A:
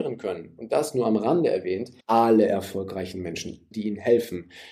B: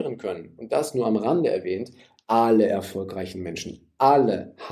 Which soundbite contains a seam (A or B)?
A